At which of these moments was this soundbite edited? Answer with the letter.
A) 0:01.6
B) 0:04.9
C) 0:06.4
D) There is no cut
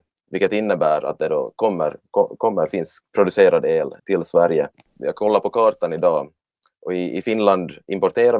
B